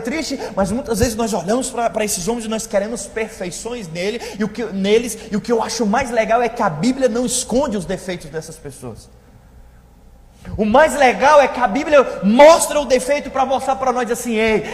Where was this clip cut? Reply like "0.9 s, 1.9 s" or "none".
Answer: none